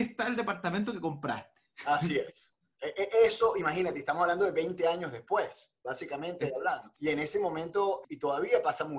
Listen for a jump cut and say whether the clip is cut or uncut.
cut